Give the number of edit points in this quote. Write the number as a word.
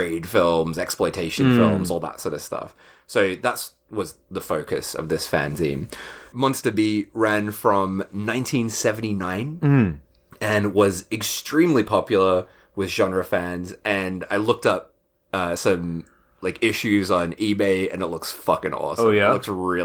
zero